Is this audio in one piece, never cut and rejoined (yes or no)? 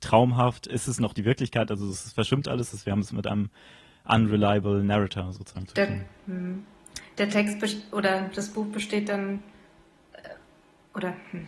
yes